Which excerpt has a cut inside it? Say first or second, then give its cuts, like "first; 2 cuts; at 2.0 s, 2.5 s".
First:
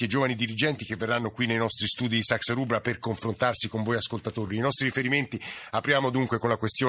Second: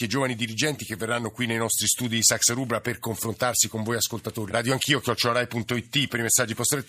second; 1 cut; at 4.5 s